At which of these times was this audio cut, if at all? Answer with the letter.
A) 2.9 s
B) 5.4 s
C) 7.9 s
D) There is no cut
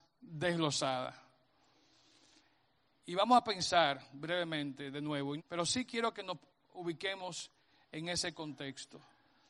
B